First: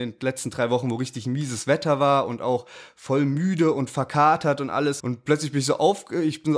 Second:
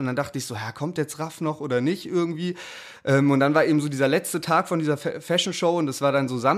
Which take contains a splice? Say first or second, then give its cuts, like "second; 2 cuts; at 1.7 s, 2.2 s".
first; 1 cut; at 5.0 s